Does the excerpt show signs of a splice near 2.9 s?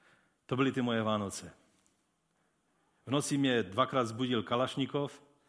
no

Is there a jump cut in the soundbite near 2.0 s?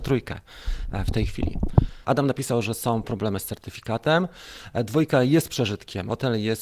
yes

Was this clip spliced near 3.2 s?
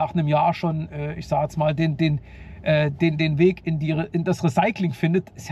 no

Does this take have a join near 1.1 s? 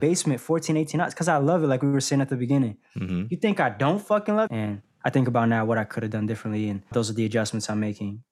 no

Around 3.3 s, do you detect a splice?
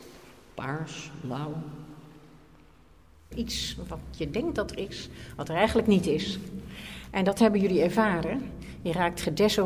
yes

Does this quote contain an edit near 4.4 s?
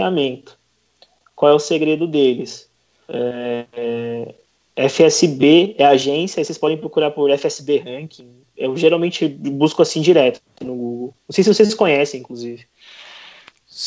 no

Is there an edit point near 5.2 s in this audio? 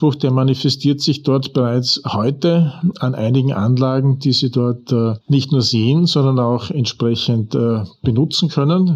yes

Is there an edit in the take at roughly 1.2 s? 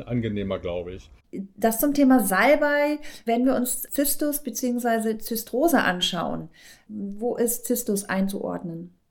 yes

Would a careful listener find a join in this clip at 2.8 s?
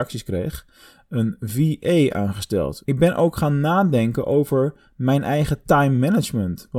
yes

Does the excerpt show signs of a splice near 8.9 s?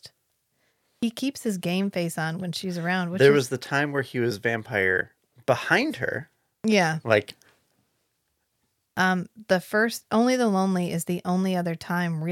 yes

